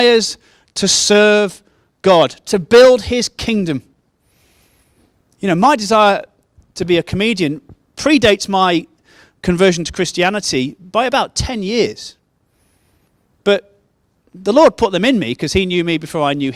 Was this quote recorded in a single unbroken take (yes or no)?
yes